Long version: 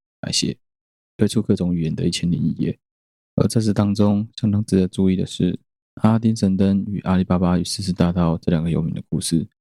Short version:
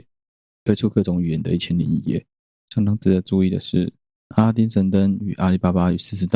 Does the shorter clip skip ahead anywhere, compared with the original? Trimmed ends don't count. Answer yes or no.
yes